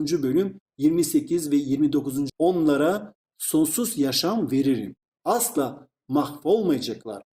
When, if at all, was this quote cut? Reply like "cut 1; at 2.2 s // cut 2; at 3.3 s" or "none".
cut 1; at 2.3 s